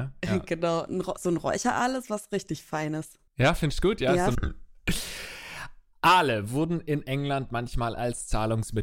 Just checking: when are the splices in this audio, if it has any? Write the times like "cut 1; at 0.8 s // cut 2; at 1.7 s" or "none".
cut 1; at 3.3 s // cut 2; at 4.3 s